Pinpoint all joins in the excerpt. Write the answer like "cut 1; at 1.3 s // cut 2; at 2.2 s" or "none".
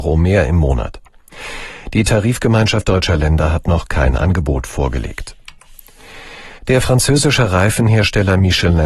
cut 1; at 6.6 s